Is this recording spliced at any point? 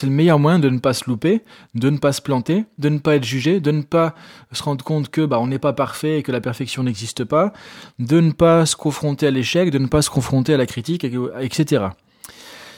yes; 1 cut; at 2.8 s

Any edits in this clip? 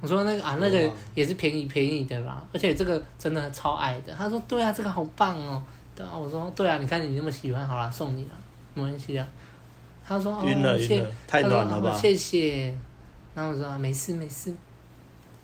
no; 0 cuts

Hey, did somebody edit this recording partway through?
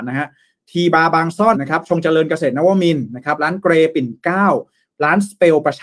yes; 1 cut; at 1.5 s

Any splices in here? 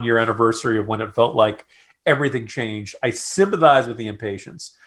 no; 0 cuts

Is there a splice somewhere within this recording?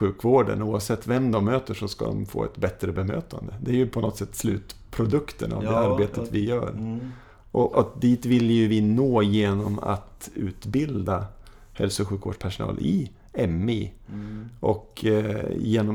yes; 1 cut; at 7.7 s

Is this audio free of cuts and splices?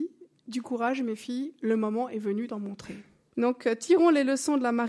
no; 1 cut; at 3.3 s

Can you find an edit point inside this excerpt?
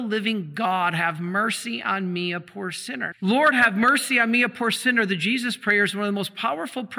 yes; 1 cut; at 3.1 s

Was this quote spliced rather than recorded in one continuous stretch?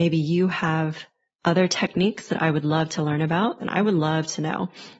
yes; 1 cut; at 3.6 s

